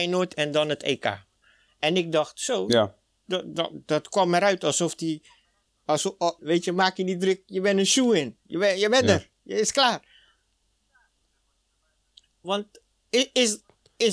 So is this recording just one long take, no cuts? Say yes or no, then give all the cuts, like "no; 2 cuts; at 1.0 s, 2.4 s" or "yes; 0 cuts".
no; 1 cut; at 6.4 s